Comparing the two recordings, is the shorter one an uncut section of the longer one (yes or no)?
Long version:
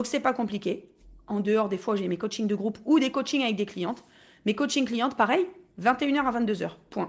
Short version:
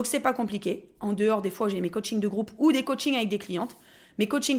no